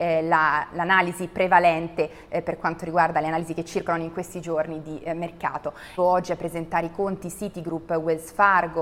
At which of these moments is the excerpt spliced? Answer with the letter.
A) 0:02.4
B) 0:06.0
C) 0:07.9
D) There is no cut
B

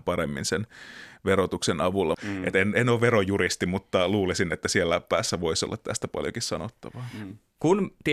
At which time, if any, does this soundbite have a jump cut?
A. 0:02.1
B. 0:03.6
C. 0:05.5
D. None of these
A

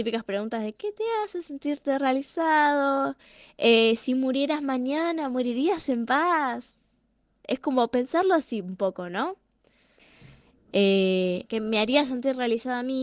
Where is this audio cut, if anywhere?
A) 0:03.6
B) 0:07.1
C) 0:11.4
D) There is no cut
C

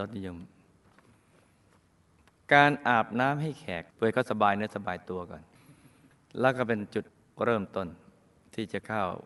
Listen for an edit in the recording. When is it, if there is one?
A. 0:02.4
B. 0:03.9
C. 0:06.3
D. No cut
B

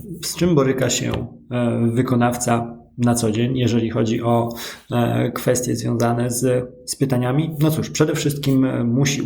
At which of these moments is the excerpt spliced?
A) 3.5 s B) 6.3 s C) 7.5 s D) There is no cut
D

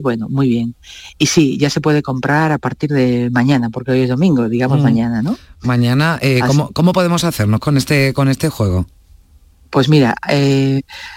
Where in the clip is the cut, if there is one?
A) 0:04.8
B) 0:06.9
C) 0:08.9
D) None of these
D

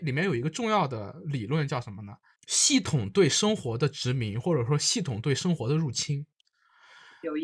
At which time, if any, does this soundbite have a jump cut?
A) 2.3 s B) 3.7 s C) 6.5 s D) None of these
A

